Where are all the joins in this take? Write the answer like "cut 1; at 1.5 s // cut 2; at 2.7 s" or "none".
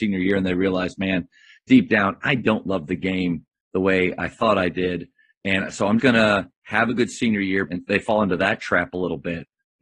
cut 1; at 6.0 s // cut 2; at 7.7 s